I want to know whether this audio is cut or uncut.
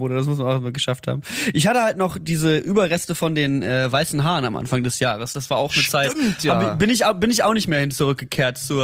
uncut